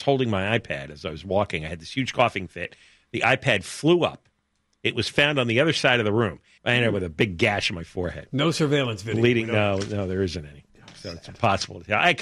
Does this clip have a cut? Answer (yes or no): yes